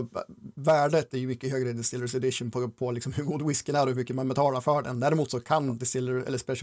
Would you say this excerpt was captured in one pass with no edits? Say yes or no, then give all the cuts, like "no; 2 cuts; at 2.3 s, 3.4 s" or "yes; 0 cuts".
yes; 0 cuts